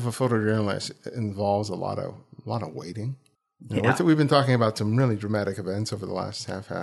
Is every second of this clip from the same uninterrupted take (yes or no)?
yes